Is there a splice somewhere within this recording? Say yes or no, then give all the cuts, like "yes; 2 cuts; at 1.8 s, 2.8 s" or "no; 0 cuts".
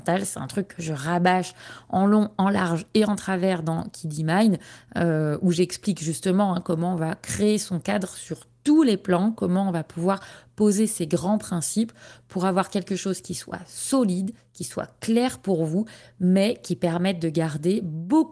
no; 0 cuts